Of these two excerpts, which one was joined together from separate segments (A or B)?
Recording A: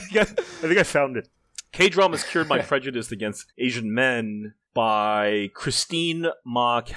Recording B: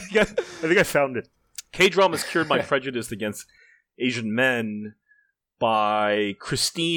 A